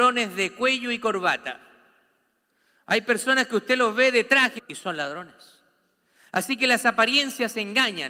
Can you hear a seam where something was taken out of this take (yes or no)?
yes